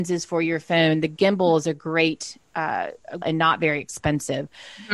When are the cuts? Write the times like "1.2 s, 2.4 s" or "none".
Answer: 3.2 s